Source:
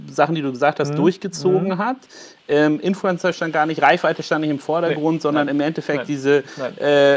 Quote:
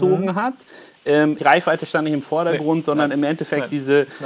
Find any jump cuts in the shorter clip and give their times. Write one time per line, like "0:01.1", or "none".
0:01.4

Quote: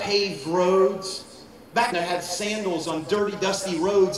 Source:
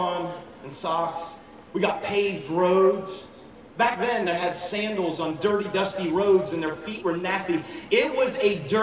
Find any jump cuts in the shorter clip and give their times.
0:01.9

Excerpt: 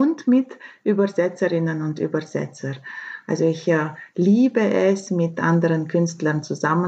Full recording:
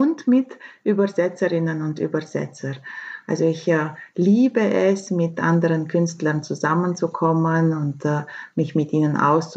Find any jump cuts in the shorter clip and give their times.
none

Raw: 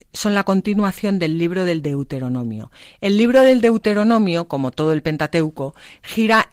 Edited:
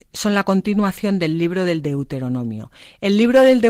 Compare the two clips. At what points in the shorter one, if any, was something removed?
none

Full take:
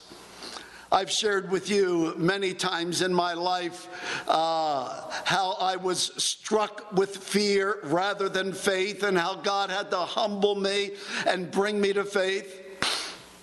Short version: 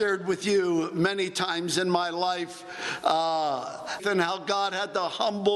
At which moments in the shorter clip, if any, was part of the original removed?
0:04.0

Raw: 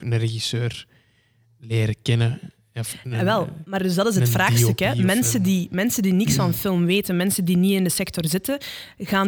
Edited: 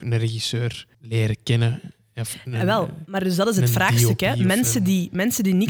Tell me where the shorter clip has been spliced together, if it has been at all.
0:00.9

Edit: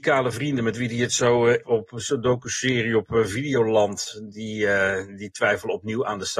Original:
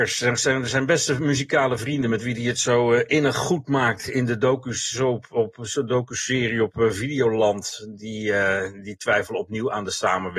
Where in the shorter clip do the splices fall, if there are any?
0:01.6

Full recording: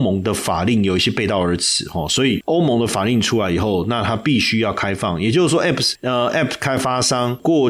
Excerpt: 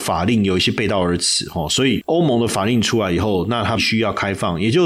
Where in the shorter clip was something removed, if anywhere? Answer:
0:03.8

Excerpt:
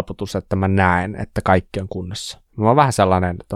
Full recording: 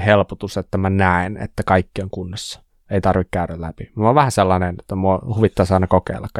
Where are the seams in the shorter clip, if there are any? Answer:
0:02.5

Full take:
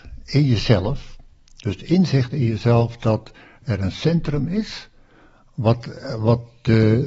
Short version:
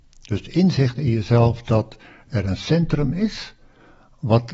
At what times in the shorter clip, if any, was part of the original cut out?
none

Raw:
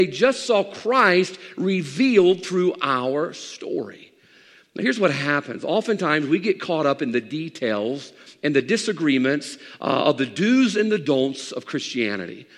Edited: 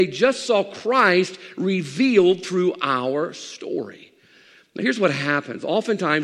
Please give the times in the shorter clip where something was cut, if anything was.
none

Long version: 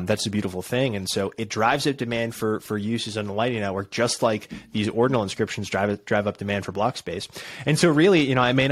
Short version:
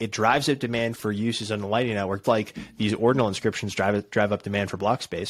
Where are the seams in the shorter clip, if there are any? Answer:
0:00.9
0:02.2

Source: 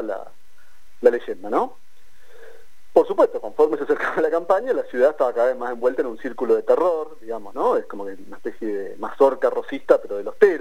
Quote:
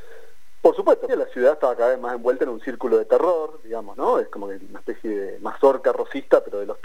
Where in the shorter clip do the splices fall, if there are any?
0:01.1

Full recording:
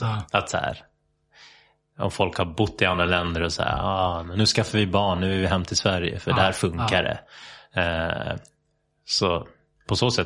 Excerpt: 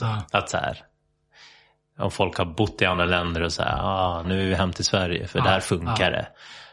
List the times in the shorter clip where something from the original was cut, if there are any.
0:04.2

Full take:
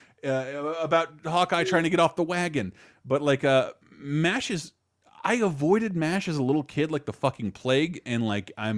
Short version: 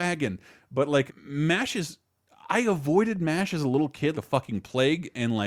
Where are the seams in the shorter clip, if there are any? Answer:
0:01.1
0:04.1

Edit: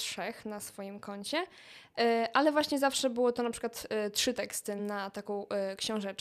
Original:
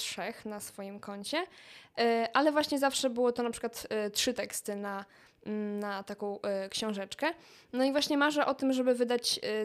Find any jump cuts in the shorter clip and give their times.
0:04.8

